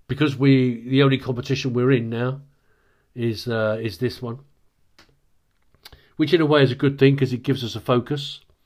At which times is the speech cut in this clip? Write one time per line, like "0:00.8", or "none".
none